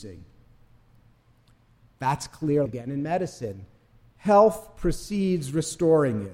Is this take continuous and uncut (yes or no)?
no